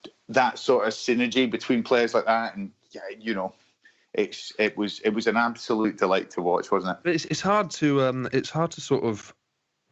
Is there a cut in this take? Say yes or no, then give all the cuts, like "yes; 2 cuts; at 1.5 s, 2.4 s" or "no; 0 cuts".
yes; 1 cut; at 7.3 s